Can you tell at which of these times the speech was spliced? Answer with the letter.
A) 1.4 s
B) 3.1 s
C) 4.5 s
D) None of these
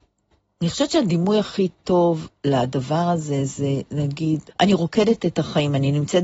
C